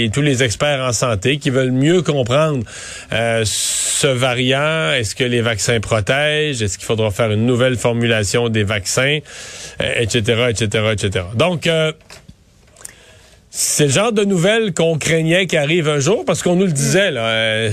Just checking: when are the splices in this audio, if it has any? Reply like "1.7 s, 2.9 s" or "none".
none